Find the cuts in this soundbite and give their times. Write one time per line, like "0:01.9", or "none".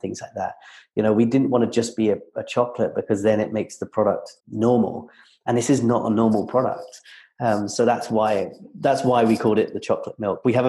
0:04.4